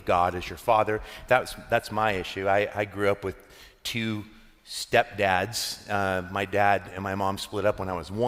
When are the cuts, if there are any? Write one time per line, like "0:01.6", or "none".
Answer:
none